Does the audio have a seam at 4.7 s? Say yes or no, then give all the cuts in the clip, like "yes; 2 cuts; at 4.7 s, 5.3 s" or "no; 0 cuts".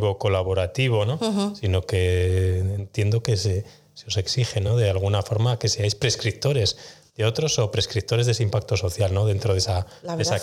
no; 0 cuts